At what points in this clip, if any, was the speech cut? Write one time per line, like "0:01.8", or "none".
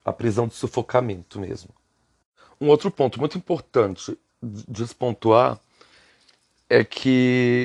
none